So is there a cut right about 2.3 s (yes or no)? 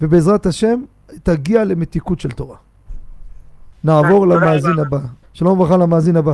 no